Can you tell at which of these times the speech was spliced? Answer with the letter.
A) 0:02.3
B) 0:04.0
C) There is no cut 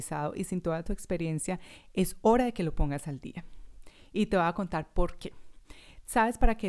C